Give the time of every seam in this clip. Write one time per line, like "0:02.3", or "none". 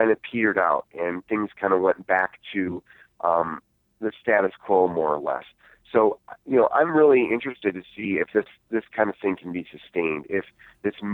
none